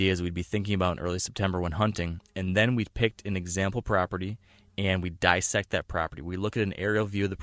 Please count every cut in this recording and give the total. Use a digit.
0